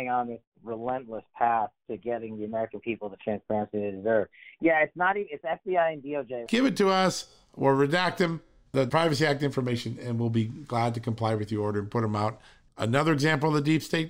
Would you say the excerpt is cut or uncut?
cut